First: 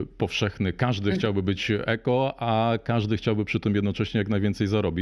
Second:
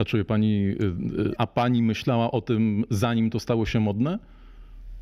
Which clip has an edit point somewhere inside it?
second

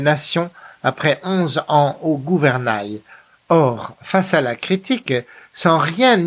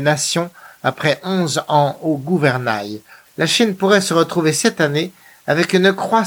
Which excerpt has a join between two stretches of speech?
second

